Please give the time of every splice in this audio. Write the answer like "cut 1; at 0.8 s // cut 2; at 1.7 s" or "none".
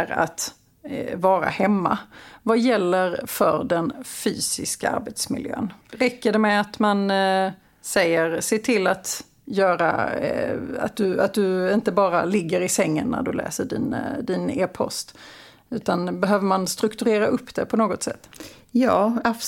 cut 1; at 5.8 s